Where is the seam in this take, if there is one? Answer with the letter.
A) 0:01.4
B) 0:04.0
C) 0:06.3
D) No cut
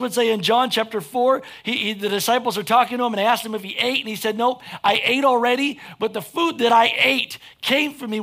D